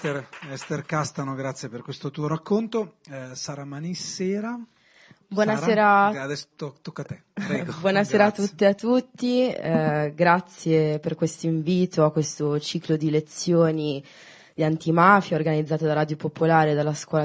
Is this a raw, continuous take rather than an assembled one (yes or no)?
yes